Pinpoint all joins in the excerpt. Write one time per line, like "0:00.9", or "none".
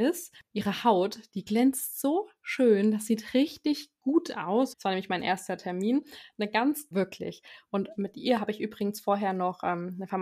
0:04.7
0:06.9